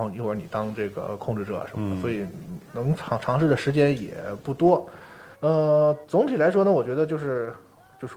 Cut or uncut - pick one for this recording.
cut